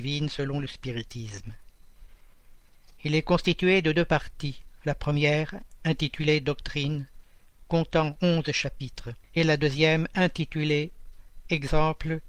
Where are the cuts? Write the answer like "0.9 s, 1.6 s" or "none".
9.2 s